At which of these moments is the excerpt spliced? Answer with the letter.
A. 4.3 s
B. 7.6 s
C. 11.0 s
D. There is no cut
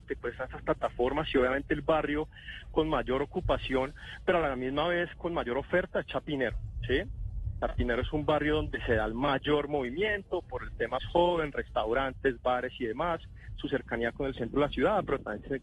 C